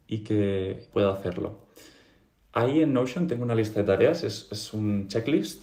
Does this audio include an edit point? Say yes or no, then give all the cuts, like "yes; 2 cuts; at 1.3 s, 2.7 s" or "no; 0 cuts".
yes; 1 cut; at 0.9 s